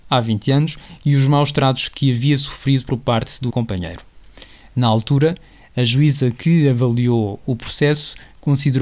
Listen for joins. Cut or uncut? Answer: cut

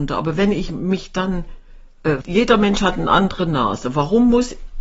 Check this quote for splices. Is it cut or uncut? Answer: cut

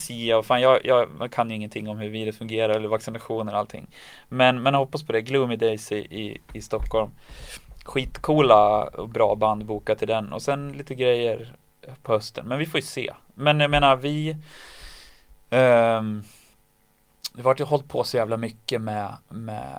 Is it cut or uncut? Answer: uncut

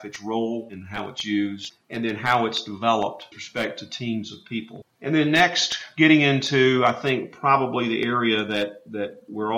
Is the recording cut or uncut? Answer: uncut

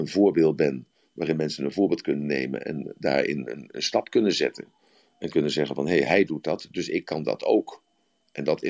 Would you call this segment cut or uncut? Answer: uncut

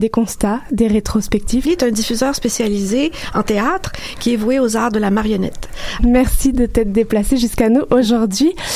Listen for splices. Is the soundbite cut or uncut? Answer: cut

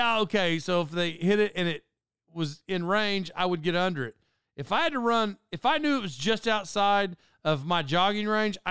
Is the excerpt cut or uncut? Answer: uncut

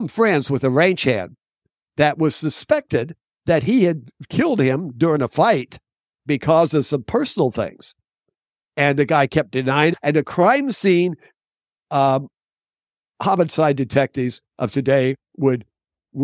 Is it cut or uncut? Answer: uncut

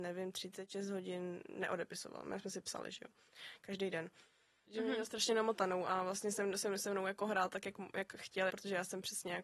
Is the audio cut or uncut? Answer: cut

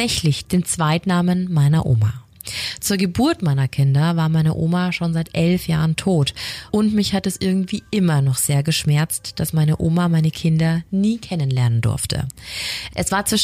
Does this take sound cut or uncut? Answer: uncut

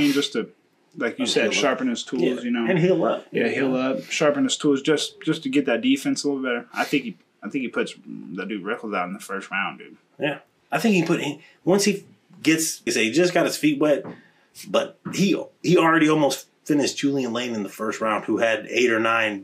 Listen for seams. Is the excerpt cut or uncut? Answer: cut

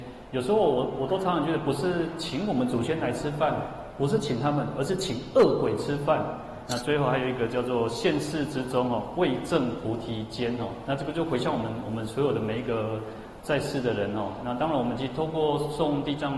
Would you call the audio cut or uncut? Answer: cut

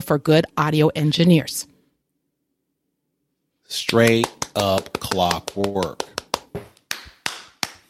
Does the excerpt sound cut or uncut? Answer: uncut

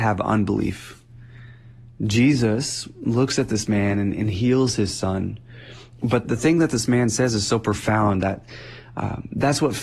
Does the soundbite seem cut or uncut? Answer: cut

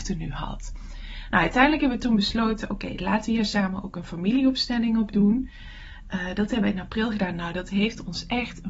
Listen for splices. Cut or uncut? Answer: uncut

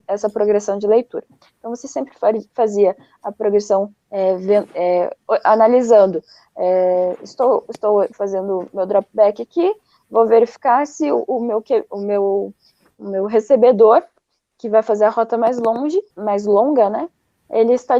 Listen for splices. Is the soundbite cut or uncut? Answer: cut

